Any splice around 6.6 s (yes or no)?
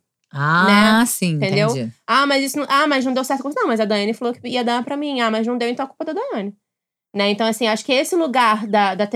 no